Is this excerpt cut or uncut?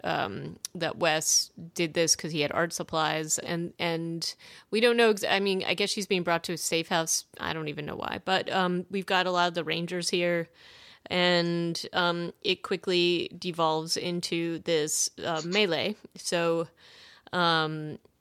cut